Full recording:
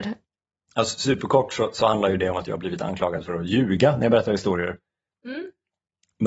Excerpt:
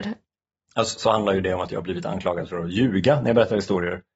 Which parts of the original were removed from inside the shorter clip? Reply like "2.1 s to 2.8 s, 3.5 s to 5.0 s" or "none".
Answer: 1.0 s to 1.7 s